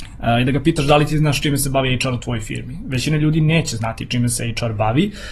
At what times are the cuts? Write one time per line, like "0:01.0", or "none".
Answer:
none